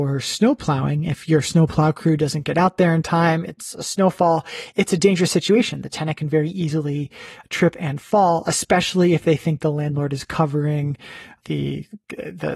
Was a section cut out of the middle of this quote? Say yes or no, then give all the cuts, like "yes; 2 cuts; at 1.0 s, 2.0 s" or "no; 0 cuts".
no; 0 cuts